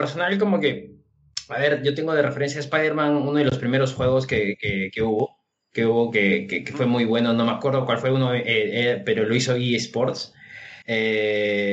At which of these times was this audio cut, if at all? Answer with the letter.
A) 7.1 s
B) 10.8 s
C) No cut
B